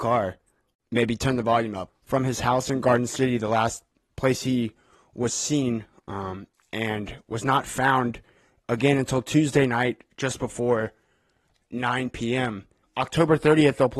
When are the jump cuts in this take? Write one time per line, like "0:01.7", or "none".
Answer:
0:01.9
0:12.8